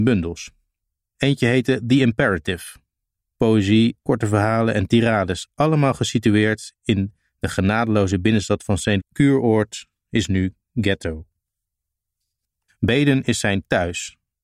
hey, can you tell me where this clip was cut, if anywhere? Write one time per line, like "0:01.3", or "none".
0:04.0
0:09.0
0:12.7